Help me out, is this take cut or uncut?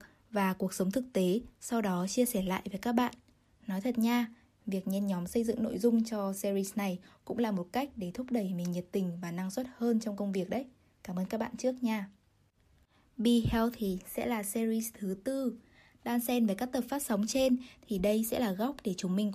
uncut